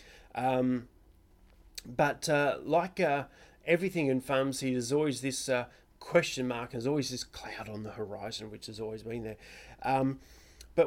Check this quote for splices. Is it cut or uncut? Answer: uncut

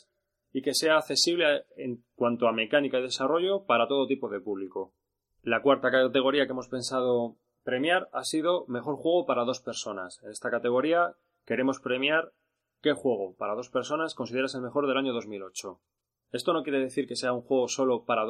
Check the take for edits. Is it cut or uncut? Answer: uncut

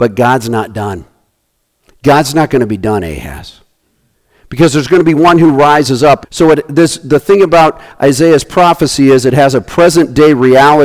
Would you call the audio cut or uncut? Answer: cut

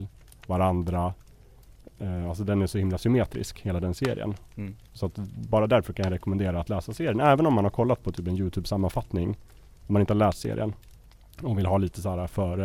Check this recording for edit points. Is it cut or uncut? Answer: uncut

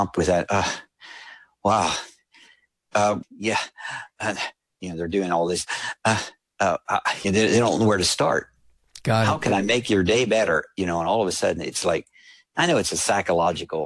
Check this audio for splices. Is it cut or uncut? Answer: cut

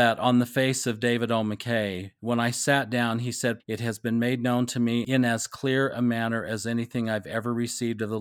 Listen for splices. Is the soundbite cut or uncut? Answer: cut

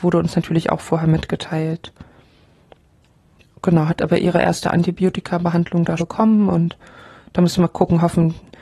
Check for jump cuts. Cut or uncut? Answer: cut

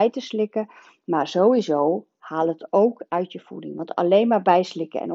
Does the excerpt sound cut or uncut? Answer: uncut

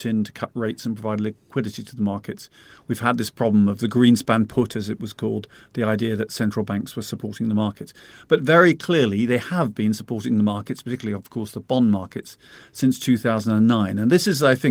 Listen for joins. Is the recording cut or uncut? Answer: uncut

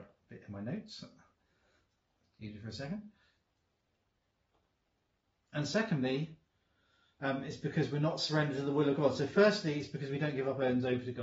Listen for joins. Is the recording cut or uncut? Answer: uncut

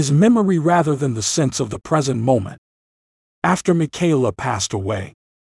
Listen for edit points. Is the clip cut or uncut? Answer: uncut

